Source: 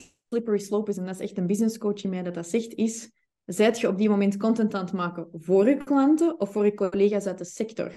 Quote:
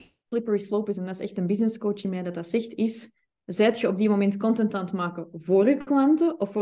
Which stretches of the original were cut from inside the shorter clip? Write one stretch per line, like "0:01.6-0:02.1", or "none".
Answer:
none